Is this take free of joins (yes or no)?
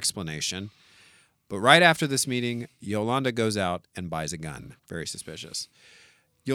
no